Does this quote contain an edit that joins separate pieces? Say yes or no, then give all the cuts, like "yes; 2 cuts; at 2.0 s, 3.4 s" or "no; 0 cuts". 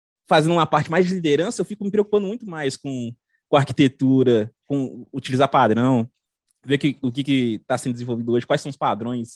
no; 0 cuts